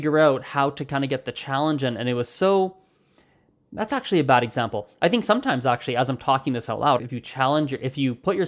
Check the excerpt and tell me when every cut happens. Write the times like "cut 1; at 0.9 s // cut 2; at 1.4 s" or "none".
cut 1; at 7.0 s